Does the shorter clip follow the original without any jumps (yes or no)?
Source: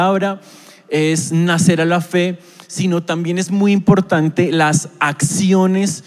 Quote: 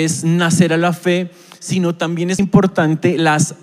no